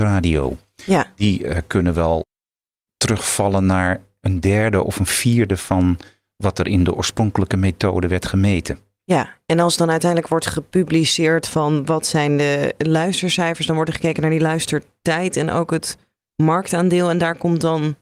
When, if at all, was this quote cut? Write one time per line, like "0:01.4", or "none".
none